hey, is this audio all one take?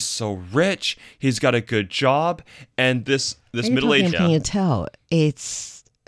no; 1 cut; at 4.1 s

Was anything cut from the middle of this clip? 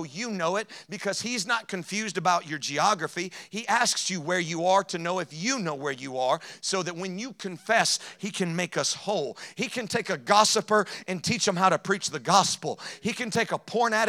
no; 0 cuts

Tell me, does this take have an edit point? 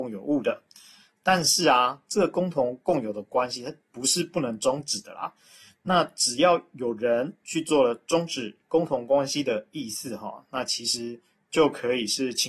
no; 0 cuts

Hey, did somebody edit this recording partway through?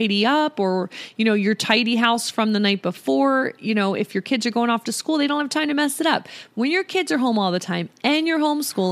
no; 0 cuts

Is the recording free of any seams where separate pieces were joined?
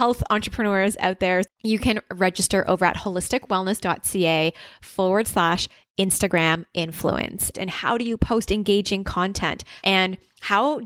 no; 3 cuts; at 1.4 s, 7.5 s, 9.8 s

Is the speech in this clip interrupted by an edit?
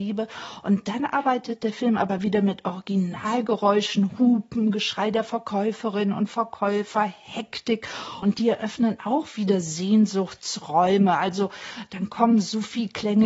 yes; 1 cut; at 8.2 s

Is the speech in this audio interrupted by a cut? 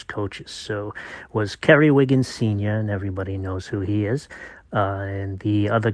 no; 0 cuts

